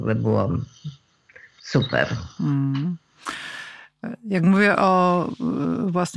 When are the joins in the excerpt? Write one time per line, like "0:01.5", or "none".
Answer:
none